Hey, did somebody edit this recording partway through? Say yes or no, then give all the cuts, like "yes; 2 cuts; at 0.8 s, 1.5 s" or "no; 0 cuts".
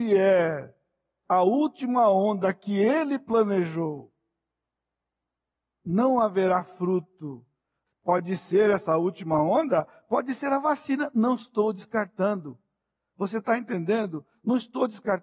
yes; 1 cut; at 7.9 s